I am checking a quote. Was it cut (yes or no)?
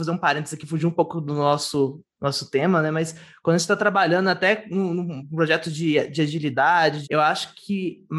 yes